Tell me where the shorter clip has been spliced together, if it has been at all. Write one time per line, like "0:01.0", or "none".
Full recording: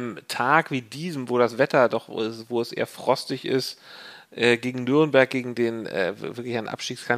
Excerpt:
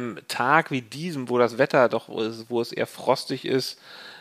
none